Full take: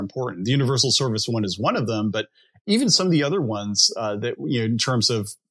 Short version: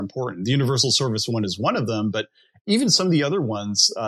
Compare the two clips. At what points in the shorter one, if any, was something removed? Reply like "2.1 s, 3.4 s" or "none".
none